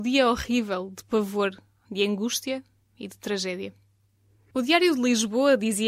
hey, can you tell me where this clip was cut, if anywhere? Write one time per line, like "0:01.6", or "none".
0:01.8
0:04.4